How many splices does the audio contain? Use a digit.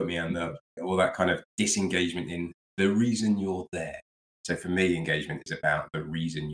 0